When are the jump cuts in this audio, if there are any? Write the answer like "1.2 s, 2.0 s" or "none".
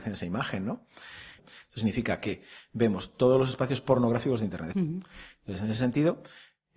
1.4 s, 4.7 s